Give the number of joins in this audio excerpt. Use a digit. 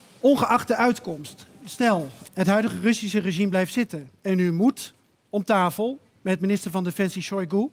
1